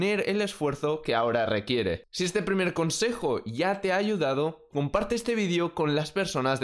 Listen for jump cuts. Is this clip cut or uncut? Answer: cut